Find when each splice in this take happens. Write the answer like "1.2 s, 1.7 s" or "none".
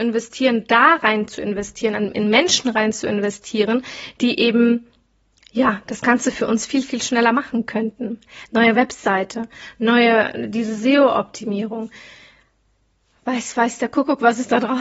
none